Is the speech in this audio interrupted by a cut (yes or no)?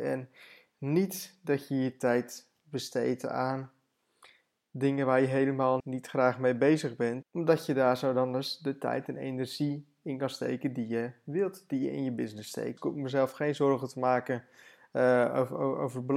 yes